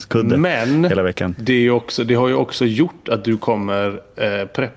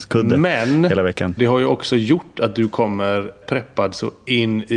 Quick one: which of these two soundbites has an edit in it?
second; 2 cuts; at 1.4 s, 3.4 s

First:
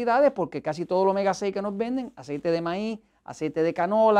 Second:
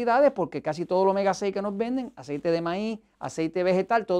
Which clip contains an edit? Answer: second; 1 cut; at 3.1 s

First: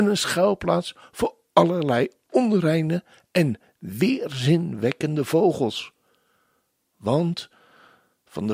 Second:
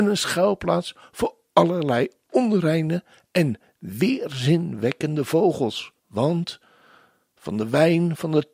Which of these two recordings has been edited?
second; 1 cut; at 6.0 s

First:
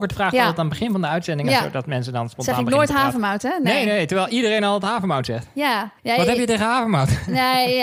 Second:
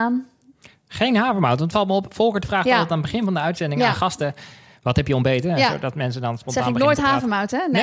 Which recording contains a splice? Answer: first; 2 cuts; at 1.5 s, 6.0 s

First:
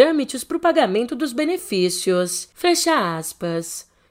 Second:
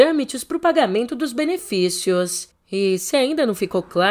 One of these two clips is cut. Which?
second; 1 cut; at 2.5 s

